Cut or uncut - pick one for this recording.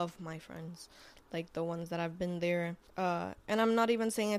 cut